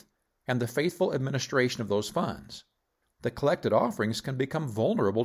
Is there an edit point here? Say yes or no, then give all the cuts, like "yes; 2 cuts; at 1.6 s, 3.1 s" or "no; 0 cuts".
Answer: yes; 1 cut; at 3.0 s